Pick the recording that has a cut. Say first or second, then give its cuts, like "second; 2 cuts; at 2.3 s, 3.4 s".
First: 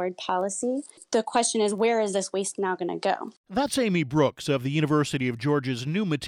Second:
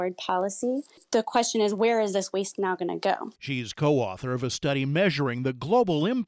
second; 1 cut; at 3.3 s